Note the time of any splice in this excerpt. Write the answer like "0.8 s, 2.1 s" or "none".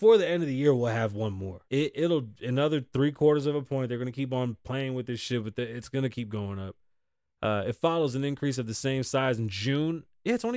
1.7 s